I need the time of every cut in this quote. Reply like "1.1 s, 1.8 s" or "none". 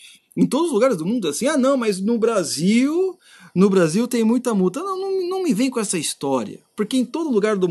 none